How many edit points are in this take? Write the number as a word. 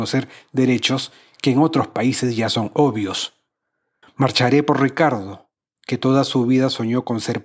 one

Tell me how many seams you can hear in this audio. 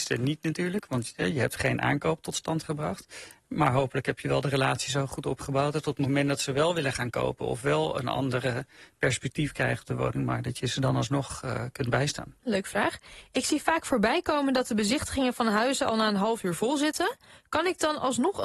one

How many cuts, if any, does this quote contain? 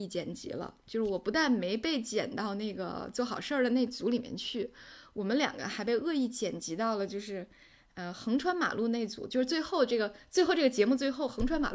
zero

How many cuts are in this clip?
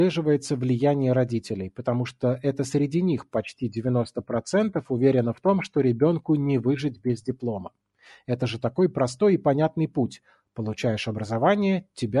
zero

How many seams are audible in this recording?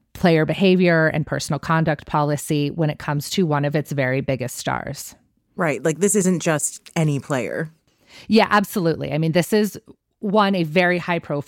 zero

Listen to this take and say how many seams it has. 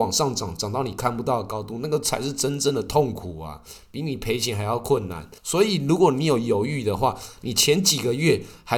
one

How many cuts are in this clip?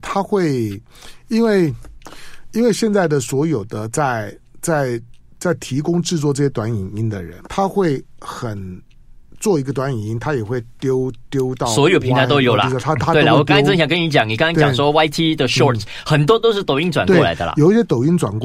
one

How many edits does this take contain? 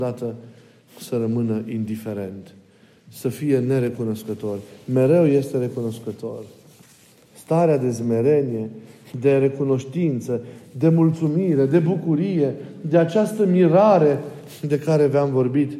one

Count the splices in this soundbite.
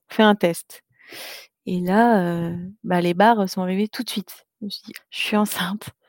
one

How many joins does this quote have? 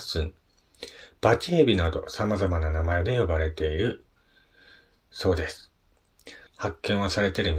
one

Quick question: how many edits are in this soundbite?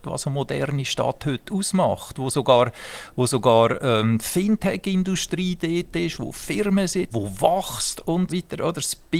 two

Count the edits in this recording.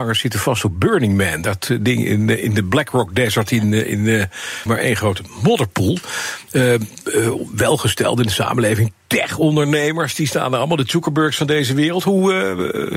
one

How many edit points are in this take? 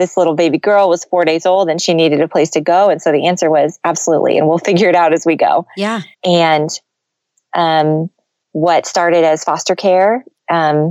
one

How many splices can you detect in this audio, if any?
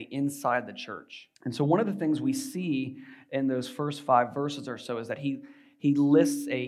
one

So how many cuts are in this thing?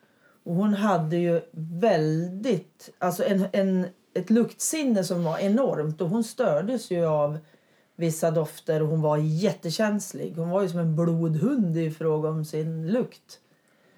zero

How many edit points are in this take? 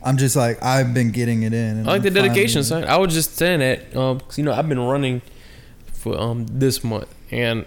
zero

